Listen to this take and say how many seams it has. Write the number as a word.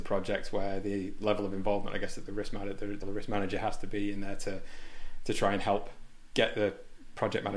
two